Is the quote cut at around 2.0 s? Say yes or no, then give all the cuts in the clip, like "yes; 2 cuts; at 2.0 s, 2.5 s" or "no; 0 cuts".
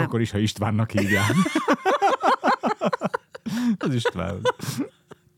no; 1 cut; at 3.8 s